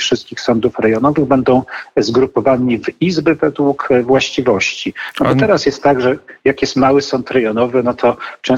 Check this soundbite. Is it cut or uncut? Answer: uncut